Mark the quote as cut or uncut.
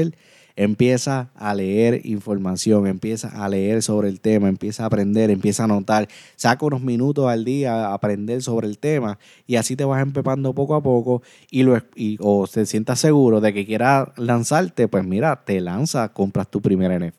cut